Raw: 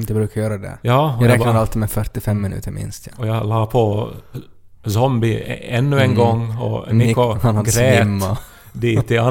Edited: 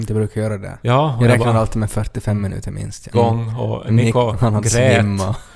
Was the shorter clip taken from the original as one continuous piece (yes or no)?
no